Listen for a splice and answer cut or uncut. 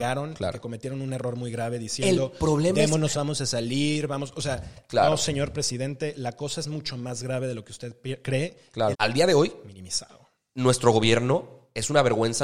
cut